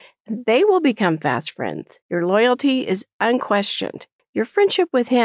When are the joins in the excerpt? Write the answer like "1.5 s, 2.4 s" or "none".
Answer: 2.0 s, 4.2 s